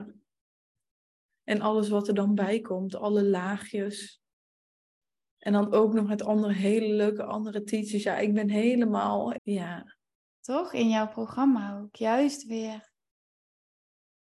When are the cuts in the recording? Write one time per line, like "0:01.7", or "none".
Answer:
0:09.4